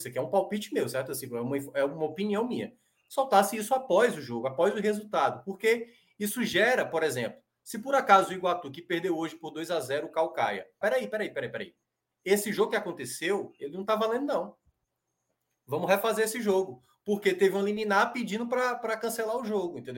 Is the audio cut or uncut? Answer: cut